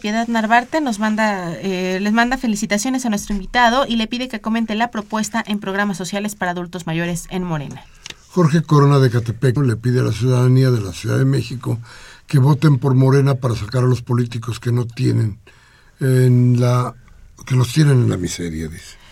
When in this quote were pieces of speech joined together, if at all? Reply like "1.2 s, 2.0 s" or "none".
9.6 s